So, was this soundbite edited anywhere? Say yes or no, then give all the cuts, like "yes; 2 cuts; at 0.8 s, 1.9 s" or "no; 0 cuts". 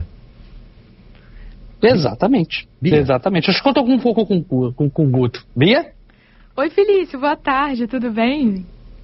no; 0 cuts